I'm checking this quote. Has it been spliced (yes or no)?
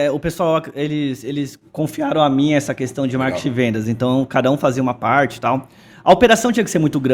no